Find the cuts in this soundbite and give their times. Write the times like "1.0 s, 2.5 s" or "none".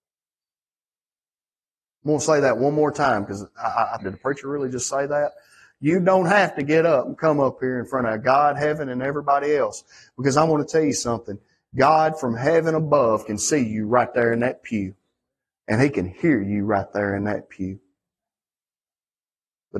4.0 s

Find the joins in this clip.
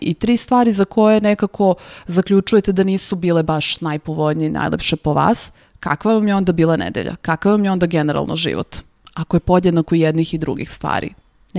none

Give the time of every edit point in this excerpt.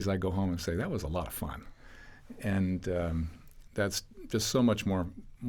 none

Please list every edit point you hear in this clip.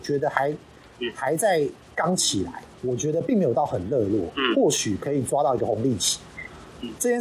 none

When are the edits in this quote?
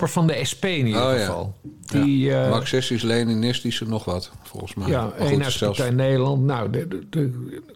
none

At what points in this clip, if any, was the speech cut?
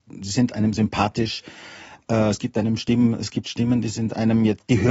none

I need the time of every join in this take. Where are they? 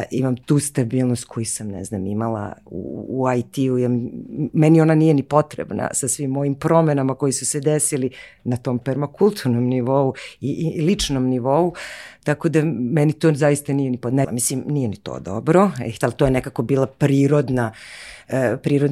14.2 s, 16.0 s

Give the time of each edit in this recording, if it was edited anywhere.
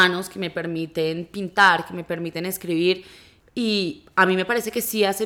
3.4 s

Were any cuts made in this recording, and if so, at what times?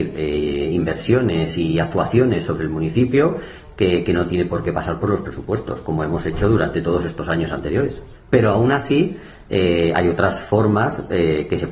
8.2 s

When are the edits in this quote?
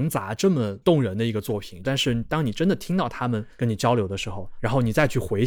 1.8 s

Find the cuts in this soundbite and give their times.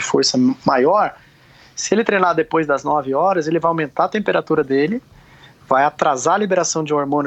none

